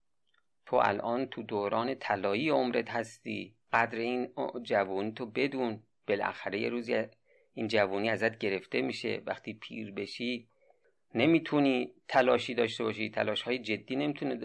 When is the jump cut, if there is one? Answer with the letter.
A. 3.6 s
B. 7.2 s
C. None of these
A